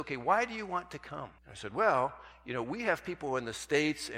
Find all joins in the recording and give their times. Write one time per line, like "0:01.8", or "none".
0:01.4